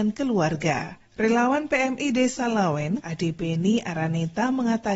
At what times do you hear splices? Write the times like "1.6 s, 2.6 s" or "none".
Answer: 3.0 s